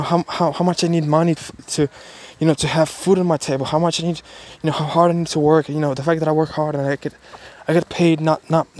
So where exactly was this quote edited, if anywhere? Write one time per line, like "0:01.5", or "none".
0:01.4